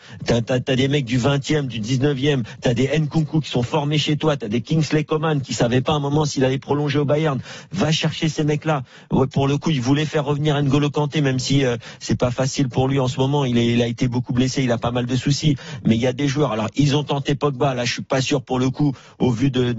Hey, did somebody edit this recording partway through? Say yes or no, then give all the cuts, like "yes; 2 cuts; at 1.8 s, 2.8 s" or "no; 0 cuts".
no; 0 cuts